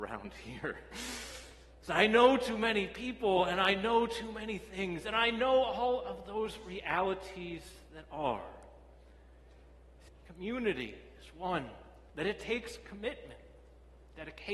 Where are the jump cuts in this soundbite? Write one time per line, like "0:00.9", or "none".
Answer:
0:10.1
0:12.1